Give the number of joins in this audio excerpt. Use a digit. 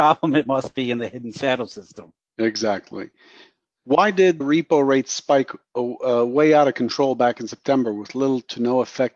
1